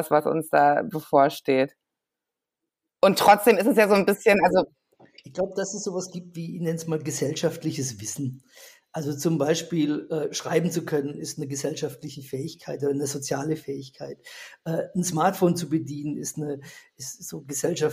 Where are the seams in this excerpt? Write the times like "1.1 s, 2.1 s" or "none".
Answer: none